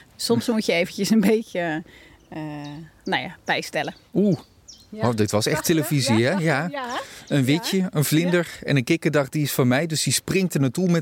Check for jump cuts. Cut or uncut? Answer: uncut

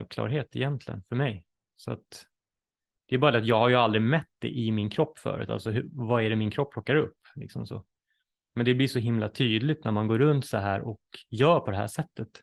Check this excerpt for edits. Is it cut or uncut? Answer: uncut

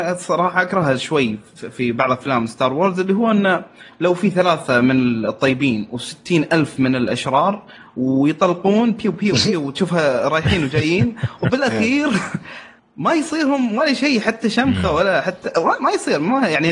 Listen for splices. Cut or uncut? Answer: uncut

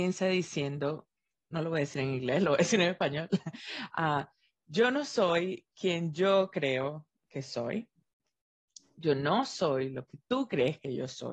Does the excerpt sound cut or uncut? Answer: uncut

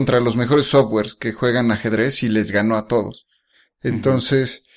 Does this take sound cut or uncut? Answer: uncut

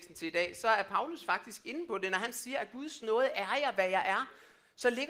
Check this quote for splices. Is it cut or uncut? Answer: uncut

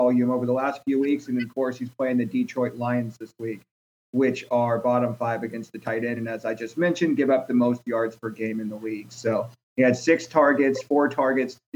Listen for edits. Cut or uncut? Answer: uncut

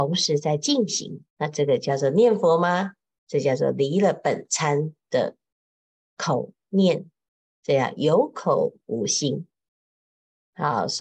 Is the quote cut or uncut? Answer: cut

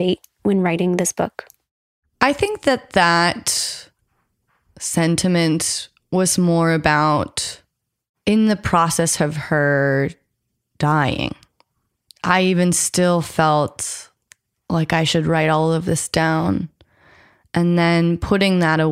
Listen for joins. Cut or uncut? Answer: uncut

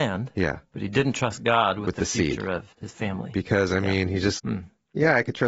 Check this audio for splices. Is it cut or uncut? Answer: cut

